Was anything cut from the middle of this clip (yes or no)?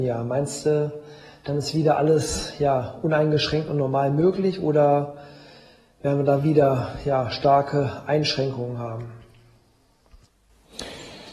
no